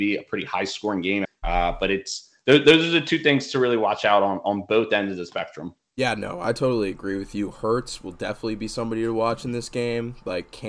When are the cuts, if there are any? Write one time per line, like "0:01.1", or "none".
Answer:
0:01.3